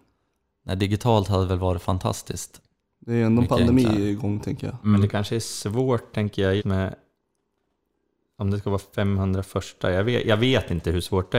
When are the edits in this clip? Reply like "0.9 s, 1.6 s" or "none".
6.6 s